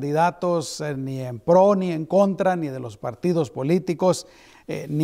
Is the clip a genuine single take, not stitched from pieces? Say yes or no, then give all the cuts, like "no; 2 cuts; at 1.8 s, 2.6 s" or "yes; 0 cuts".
yes; 0 cuts